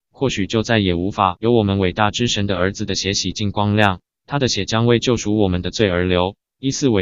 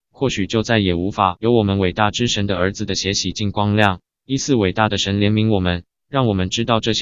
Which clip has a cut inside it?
second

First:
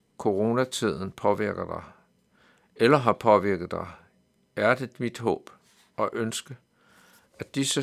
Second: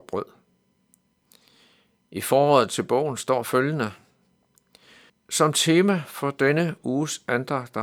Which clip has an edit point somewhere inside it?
second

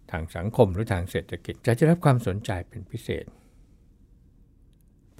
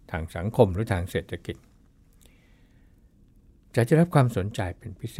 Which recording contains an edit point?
first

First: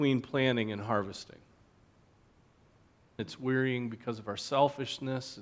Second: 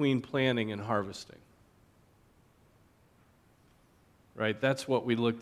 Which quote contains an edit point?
first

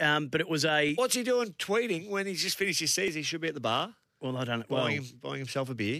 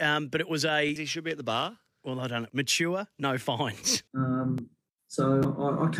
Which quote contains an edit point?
second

